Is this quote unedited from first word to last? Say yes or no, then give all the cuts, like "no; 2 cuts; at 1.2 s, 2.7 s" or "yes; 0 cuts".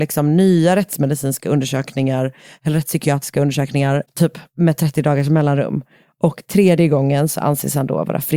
no; 1 cut; at 4.1 s